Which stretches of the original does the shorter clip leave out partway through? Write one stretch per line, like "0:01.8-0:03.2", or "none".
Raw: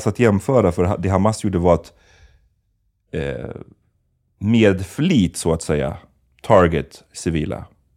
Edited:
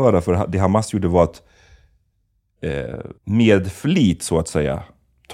0:03.7-0:04.3